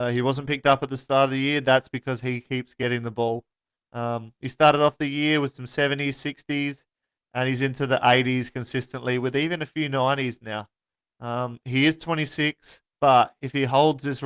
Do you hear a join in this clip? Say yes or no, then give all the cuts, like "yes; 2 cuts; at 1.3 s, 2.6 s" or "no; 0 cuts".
no; 0 cuts